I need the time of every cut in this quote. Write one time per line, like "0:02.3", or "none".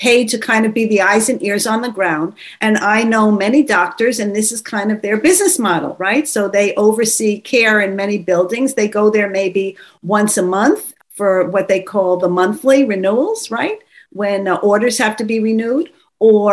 0:11.0